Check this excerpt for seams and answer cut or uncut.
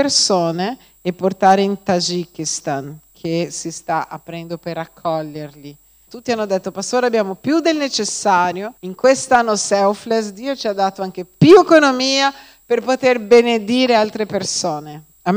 cut